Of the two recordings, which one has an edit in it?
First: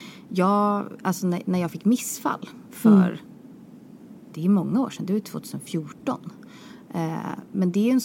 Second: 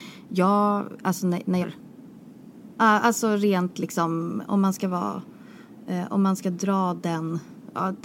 second; 2 cuts; at 1.6 s, 2.8 s

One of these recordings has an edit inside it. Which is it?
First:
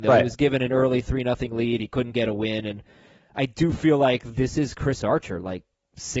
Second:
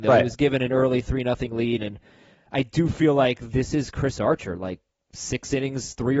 second; 1 cut; at 1.8 s

